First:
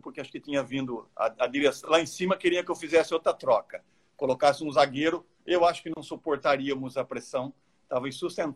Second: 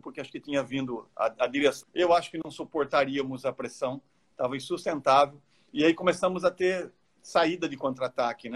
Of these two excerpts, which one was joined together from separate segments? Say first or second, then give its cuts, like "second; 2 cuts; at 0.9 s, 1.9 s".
second; 1 cut; at 1.8 s